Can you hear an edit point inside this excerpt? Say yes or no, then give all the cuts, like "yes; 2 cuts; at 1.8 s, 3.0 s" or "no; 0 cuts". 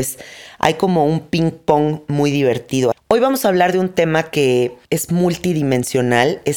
yes; 2 cuts; at 2.9 s, 4.8 s